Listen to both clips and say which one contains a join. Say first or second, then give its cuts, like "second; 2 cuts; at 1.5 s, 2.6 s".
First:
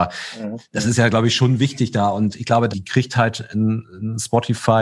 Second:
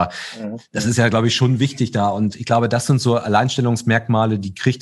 first; 1 cut; at 2.7 s